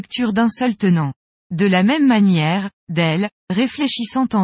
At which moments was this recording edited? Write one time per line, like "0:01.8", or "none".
0:01.4
0:02.8